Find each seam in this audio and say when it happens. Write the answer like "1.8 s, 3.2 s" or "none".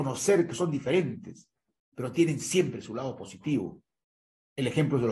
none